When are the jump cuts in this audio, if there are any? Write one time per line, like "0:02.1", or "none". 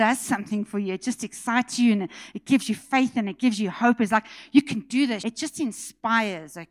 0:05.2